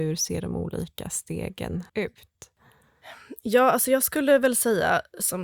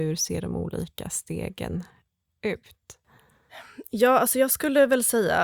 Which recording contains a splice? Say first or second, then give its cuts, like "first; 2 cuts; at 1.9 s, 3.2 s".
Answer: first; 1 cut; at 1.9 s